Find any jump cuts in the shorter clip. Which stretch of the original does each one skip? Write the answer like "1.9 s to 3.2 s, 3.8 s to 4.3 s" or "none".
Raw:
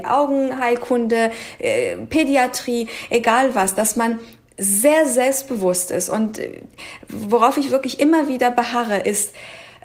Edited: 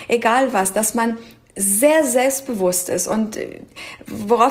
none